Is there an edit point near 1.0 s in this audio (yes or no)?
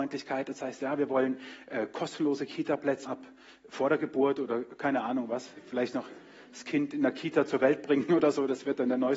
no